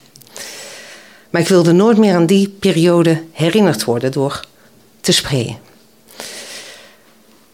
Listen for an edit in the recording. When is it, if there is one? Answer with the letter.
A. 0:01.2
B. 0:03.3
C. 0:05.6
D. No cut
A